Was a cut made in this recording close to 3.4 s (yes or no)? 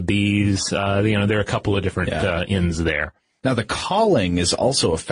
yes